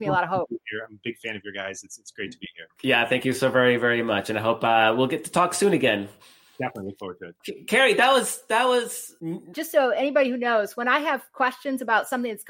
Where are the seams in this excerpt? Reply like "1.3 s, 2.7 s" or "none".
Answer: 9.5 s